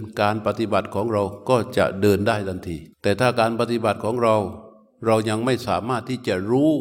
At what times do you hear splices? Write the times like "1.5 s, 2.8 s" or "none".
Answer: 2.9 s